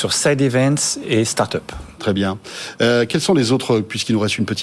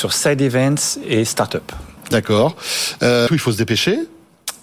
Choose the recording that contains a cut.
second; 2 cuts; at 2.0 s, 3.3 s

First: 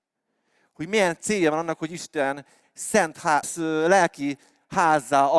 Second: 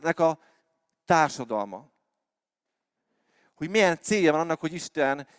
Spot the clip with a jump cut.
first; 1 cut; at 3.4 s

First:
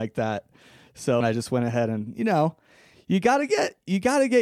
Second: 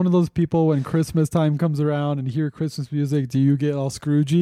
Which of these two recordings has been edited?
first; 1 cut; at 1.2 s

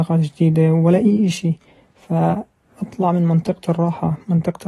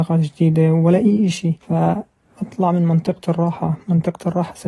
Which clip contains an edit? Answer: second; 1 cut; at 1.6 s

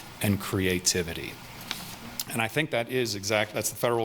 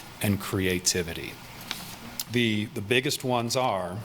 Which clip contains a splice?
second; 1 cut; at 2.2 s

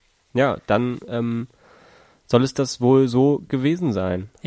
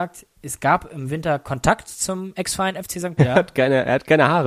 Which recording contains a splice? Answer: second; 1 cut; at 3.2 s

